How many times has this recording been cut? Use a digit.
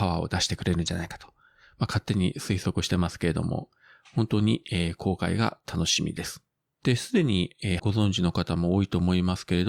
2